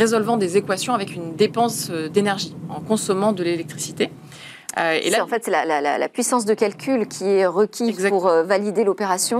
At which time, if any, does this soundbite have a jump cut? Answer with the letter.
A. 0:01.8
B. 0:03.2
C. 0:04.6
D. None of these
D